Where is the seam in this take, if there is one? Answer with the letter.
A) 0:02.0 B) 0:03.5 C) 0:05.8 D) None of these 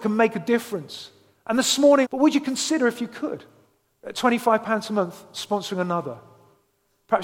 A